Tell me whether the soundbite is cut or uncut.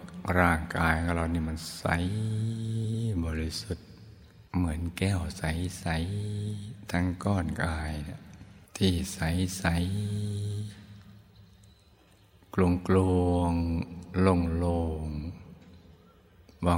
cut